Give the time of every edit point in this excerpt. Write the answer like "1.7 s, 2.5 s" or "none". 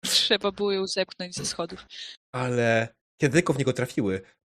2.2 s